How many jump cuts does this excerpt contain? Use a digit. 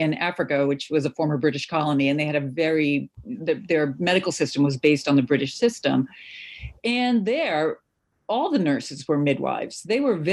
0